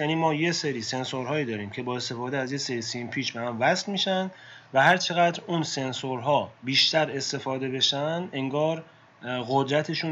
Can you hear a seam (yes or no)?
yes